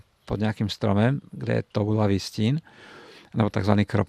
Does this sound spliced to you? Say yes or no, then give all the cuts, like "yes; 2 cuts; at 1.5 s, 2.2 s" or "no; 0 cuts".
no; 0 cuts